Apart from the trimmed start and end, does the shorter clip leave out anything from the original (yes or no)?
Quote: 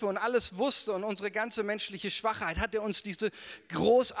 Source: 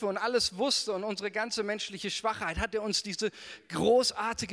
no